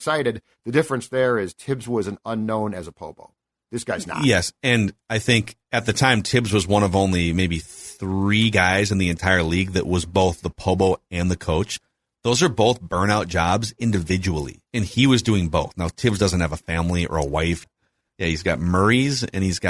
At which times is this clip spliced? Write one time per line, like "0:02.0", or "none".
0:14.7
0:17.6